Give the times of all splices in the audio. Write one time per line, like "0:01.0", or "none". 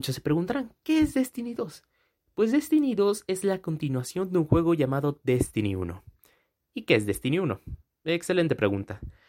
none